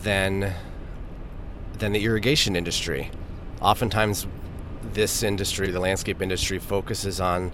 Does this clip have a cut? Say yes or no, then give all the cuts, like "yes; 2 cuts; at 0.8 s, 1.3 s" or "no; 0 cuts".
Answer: yes; 1 cut; at 5.6 s